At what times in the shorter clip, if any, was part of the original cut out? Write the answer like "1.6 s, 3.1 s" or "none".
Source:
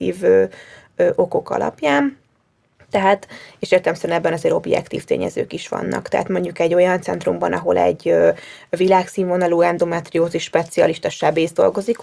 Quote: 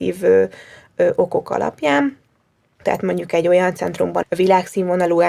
2.8 s, 4.2 s